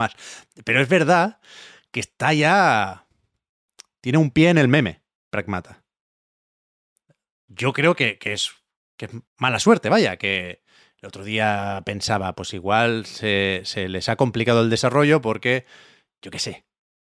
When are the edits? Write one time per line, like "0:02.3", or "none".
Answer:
0:09.3

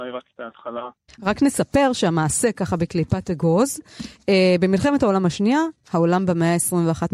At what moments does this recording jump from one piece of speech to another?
0:01.1
0:05.8

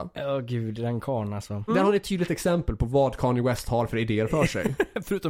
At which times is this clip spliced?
0:01.7

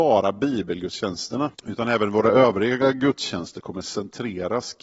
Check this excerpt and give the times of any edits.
0:01.5

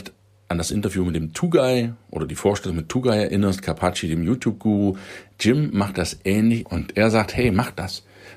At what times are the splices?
0:06.6

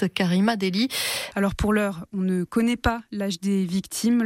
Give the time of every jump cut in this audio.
0:01.3

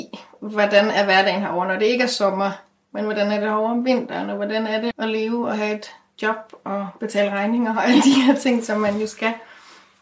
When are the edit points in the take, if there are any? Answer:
0:04.9

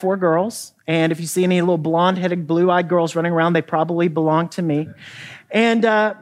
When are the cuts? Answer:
none

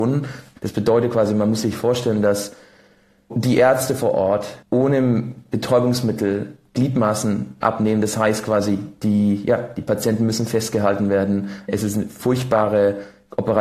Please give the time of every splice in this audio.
0:04.6

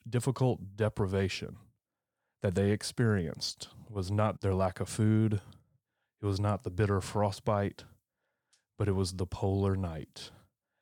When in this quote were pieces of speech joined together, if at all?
0:04.4

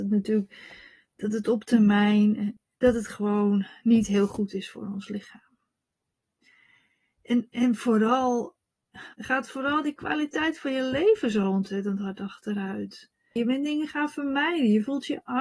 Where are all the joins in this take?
0:09.1
0:13.4

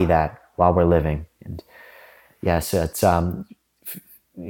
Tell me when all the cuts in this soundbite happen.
none

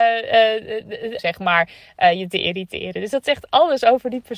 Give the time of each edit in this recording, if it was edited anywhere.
0:01.2

